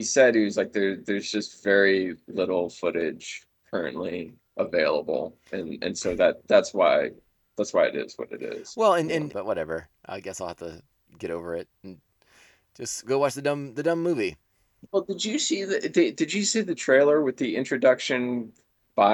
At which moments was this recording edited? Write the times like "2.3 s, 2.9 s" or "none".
9.3 s